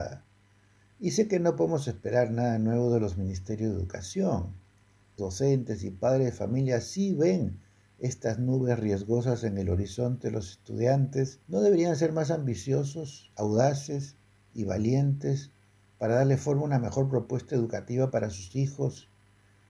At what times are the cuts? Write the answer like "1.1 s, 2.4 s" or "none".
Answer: 5.2 s, 11.4 s, 13.3 s